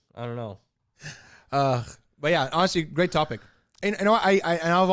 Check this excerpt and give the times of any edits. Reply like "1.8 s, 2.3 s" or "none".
none

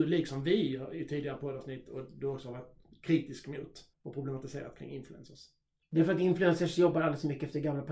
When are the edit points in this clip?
3.9 s

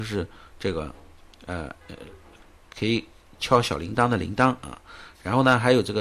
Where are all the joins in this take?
1.8 s

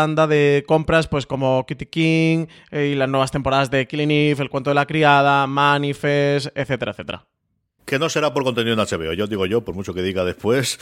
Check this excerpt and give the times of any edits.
none

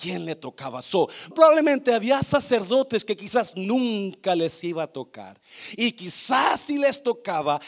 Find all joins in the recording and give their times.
1.3 s

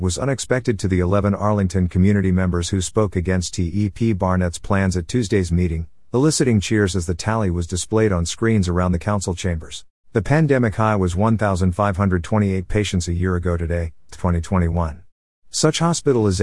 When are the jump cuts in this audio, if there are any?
10.0 s, 14.1 s

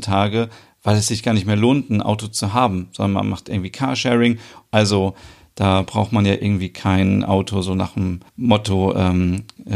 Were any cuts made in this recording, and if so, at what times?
4.7 s, 8.3 s

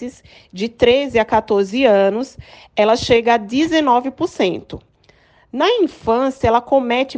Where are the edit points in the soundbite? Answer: none

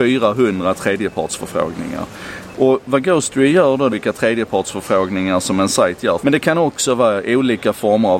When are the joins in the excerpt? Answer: 2.5 s, 3.9 s, 6.2 s

